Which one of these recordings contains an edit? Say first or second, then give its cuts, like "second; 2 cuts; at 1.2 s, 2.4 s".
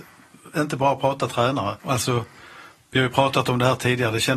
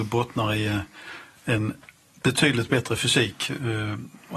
first; 1 cut; at 1.8 s